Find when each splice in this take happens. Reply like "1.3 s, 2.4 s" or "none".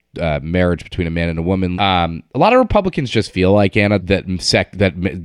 1.7 s, 4.0 s